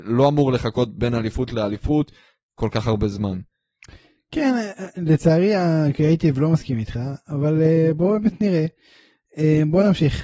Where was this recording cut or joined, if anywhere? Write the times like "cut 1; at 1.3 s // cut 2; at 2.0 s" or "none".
none